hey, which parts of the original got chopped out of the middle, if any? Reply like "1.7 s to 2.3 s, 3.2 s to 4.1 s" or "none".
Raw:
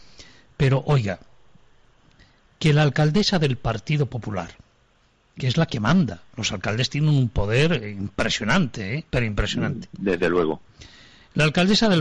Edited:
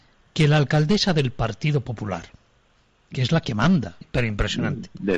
6.3 s to 9.0 s